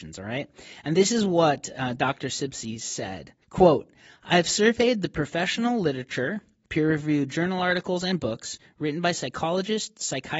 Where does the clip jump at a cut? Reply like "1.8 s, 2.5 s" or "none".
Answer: 3.4 s